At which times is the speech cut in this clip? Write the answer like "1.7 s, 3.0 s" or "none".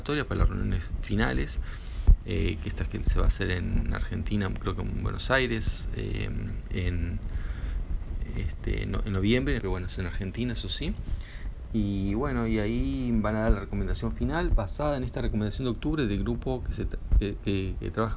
9.6 s